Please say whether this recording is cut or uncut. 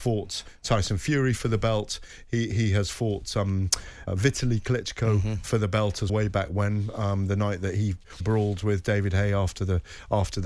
cut